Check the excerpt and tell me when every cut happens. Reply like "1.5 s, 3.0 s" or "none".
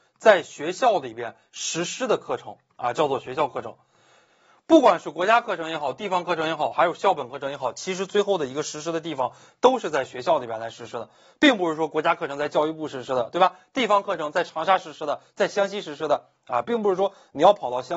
16.6 s